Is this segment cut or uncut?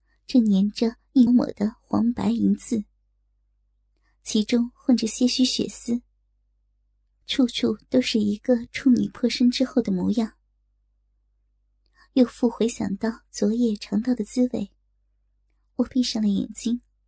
cut